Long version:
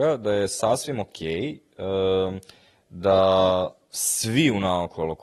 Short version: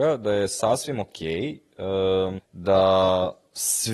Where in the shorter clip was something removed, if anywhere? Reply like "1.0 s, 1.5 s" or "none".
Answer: 2.4 s